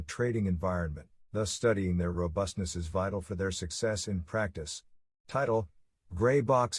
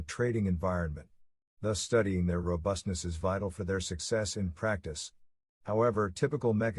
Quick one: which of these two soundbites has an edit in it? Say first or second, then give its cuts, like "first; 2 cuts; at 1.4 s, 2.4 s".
first; 2 cuts; at 1.2 s, 5.1 s